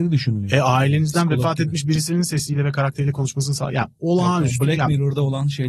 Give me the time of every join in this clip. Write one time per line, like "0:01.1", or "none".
none